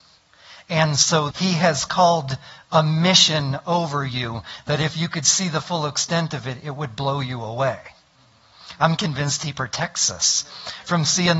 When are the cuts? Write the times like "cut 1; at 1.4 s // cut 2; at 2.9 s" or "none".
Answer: cut 1; at 1.3 s